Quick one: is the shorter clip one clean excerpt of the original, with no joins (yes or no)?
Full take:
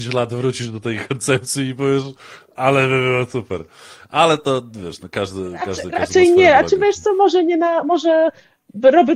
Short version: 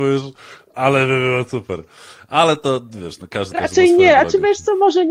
no